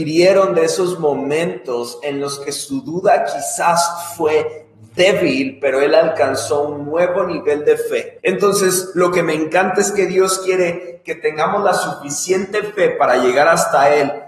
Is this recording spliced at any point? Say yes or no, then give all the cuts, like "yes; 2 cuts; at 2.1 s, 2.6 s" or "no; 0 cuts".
yes; 1 cut; at 8.2 s